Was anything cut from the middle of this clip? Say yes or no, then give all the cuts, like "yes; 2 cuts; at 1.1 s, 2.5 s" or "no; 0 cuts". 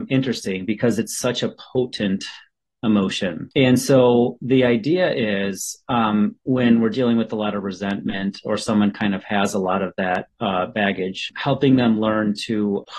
no; 0 cuts